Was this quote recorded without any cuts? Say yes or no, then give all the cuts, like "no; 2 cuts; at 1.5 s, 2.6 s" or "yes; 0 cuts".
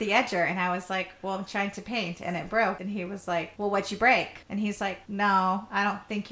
no; 1 cut; at 4.4 s